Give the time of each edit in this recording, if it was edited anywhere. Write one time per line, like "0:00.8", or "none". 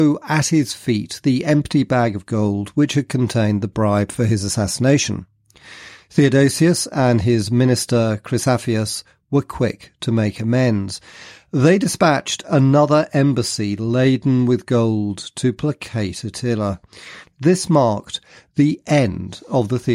0:17.2